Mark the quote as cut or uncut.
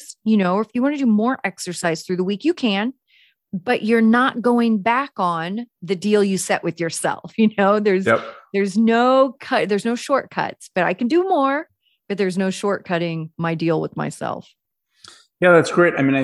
uncut